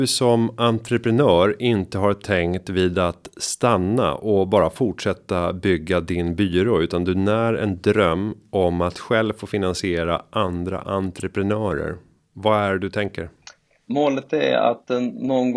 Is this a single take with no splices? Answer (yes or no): no